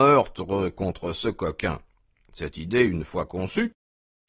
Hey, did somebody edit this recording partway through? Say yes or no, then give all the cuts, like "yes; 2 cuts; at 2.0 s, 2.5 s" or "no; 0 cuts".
no; 0 cuts